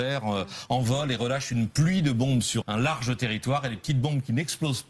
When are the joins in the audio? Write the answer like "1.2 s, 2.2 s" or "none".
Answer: 2.6 s